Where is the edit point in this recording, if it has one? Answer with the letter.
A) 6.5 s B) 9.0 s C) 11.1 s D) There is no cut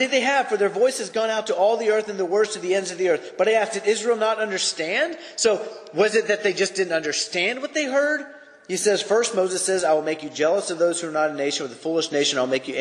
D